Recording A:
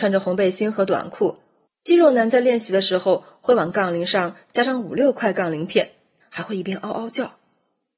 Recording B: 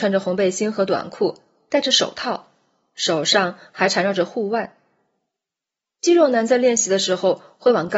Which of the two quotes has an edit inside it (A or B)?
A